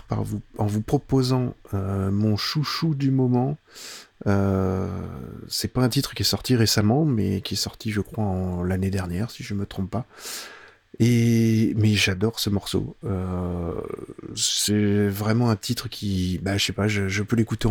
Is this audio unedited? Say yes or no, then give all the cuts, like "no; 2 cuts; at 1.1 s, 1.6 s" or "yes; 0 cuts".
yes; 0 cuts